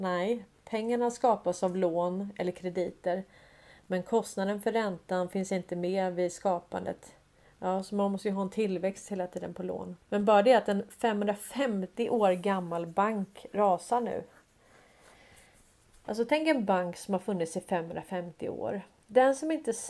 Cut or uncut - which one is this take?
cut